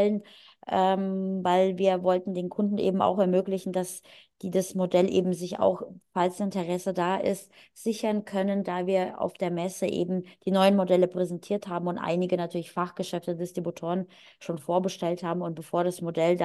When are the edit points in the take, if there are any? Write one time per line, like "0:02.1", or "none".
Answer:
none